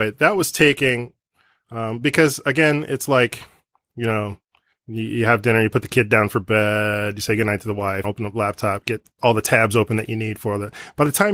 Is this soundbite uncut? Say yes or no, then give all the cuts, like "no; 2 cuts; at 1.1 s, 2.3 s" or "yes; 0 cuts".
no; 1 cut; at 8.0 s